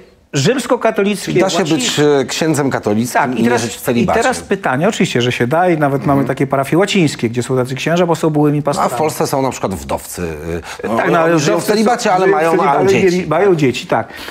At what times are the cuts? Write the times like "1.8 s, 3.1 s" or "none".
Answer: 12.7 s